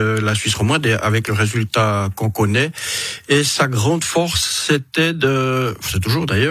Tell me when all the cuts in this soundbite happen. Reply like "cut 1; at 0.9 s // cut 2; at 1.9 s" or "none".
none